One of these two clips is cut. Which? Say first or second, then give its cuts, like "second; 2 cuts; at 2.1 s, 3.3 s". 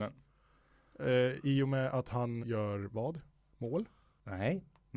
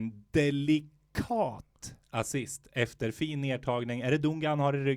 first; 1 cut; at 2.4 s